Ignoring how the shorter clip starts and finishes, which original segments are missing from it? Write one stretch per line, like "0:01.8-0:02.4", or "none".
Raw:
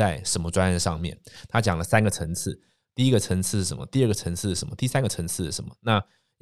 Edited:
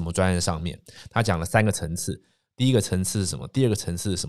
none